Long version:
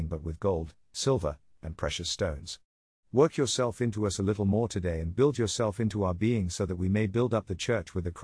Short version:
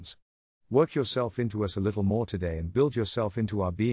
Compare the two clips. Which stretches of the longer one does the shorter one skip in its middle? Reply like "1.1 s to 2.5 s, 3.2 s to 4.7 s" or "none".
none